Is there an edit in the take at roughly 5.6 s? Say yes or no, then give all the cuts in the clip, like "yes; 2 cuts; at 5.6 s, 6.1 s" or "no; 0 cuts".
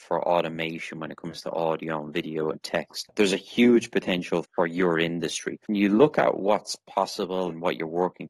yes; 1 cut; at 5.6 s